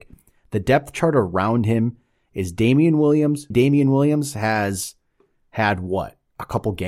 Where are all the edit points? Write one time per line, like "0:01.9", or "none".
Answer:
0:03.5